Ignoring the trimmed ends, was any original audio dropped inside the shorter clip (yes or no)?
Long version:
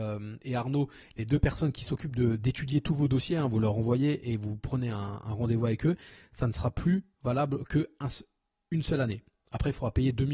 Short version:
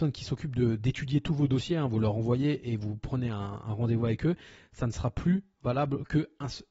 no